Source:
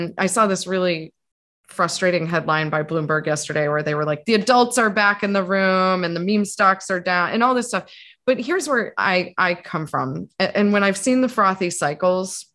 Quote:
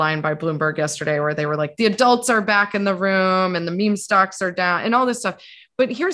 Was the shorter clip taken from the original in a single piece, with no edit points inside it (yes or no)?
yes